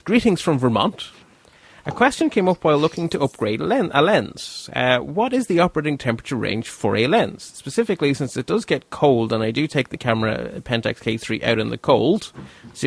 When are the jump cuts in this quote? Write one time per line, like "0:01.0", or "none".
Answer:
none